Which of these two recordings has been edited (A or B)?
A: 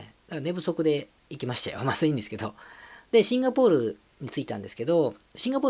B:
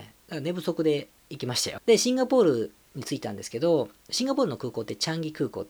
B